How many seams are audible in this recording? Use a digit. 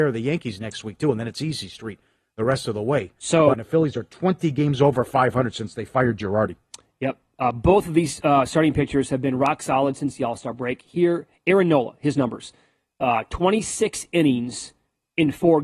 1